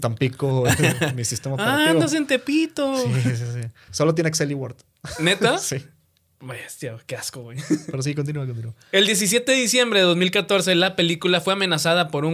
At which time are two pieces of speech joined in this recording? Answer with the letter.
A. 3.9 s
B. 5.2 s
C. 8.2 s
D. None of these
A